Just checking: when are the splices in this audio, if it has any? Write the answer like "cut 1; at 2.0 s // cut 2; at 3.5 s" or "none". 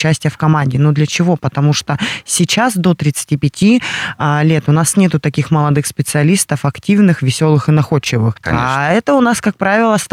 cut 1; at 8.4 s